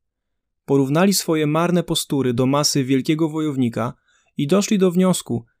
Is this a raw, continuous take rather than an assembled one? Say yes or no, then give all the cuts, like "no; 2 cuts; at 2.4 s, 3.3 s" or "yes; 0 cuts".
yes; 0 cuts